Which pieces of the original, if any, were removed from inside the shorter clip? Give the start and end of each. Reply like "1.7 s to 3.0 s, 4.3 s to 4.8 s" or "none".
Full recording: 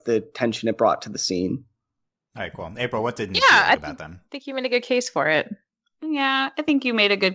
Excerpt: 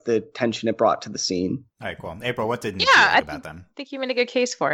1.7 s to 2.2 s

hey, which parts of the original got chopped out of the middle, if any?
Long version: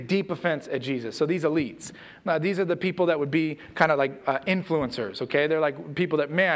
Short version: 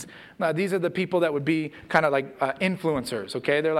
none

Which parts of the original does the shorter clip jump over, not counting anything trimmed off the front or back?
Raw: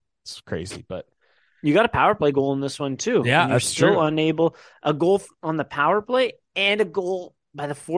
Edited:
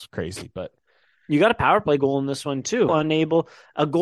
3.2 s to 4.0 s

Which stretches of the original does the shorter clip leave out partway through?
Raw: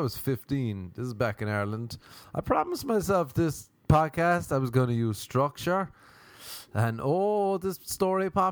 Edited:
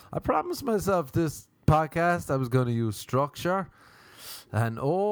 none

